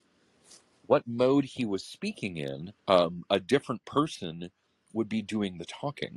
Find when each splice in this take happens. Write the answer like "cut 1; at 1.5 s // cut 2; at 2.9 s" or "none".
cut 1; at 2.8 s